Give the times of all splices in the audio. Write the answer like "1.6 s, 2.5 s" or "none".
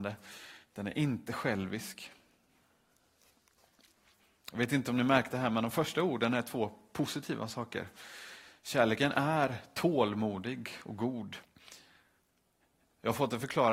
none